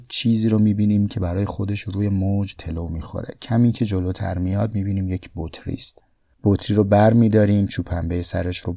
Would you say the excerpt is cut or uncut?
cut